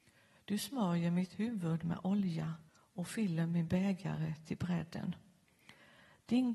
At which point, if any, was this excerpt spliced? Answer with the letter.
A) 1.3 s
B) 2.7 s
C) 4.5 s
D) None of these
B